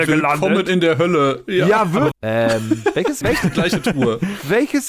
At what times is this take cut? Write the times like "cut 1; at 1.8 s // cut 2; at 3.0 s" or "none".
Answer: cut 1; at 2.1 s // cut 2; at 3.2 s